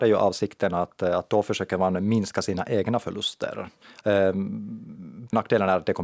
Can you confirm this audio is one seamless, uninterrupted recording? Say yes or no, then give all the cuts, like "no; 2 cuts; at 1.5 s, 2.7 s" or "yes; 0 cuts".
no; 1 cut; at 4.0 s